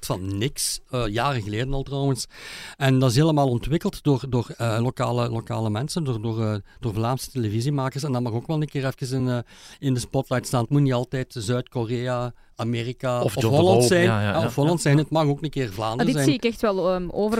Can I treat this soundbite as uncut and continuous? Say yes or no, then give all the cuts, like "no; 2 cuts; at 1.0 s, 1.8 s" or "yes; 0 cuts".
yes; 0 cuts